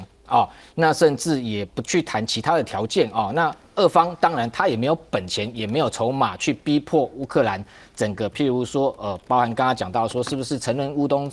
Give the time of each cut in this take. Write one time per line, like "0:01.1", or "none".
none